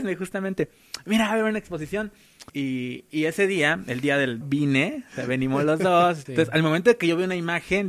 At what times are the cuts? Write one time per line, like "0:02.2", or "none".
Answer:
0:02.5
0:04.4
0:06.3